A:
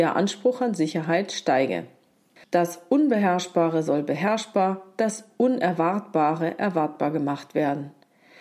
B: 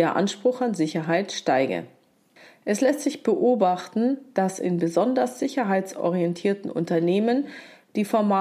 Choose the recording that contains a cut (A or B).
A